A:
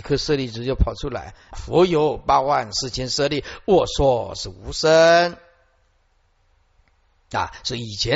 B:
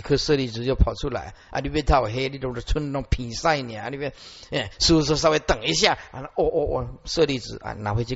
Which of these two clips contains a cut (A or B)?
A